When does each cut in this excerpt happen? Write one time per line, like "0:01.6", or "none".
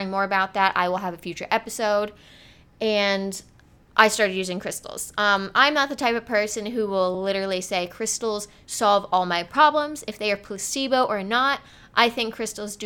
none